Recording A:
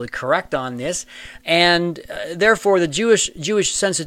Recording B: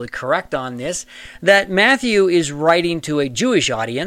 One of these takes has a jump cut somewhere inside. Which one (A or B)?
A